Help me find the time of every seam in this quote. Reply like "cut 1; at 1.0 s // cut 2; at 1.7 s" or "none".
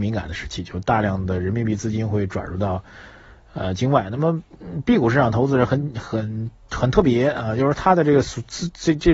none

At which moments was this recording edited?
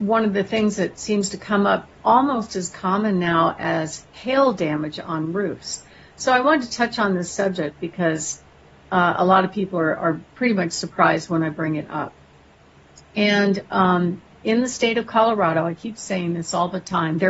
cut 1; at 13.0 s

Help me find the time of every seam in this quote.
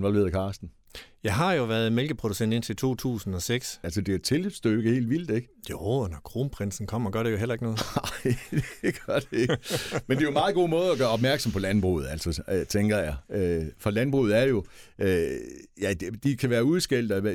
cut 1; at 3.8 s

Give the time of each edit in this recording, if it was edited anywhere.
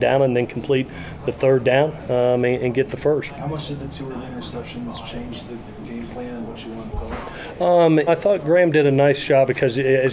cut 1; at 3.4 s // cut 2; at 8.1 s

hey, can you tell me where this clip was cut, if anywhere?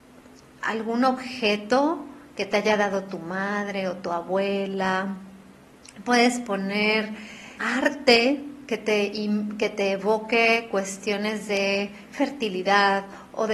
cut 1; at 7.6 s

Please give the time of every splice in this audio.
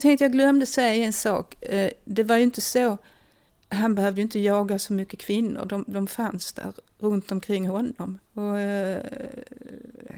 cut 1; at 8.2 s

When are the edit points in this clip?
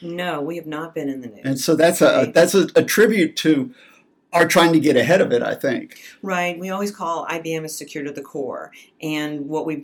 none

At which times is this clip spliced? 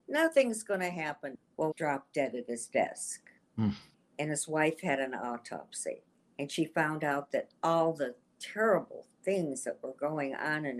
cut 1; at 1.7 s

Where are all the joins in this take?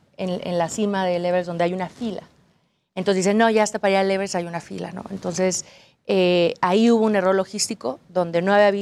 none

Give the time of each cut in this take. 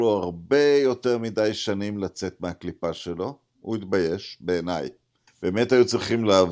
cut 1; at 5.3 s

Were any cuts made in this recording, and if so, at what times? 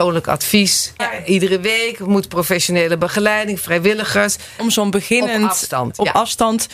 cut 1; at 1.0 s // cut 2; at 4.6 s

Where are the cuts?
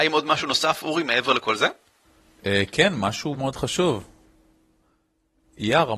cut 1; at 3.3 s

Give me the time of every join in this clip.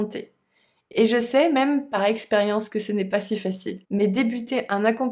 cut 1; at 3.8 s

